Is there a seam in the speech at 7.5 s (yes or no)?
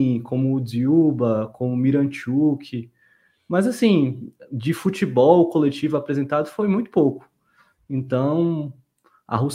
no